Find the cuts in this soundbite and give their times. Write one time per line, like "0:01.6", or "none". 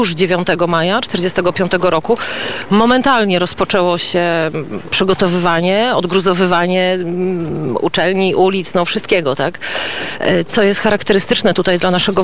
none